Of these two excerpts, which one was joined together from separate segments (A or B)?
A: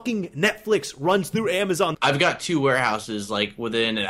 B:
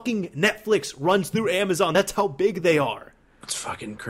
A